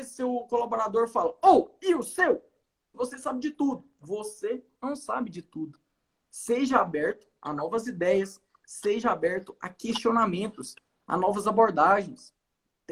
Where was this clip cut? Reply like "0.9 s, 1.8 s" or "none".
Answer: 2.9 s